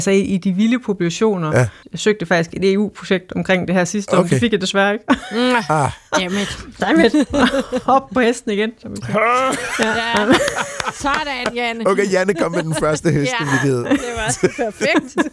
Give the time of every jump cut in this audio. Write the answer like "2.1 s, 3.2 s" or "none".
none